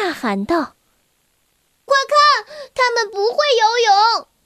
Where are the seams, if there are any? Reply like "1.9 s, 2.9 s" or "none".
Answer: 1.9 s